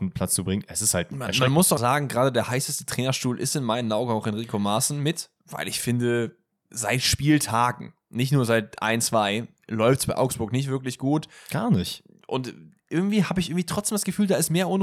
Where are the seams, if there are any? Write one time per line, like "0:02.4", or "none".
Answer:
0:01.8